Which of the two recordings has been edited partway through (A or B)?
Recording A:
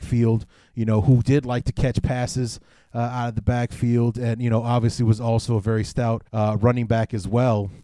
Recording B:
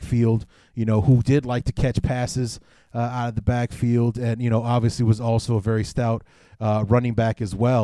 A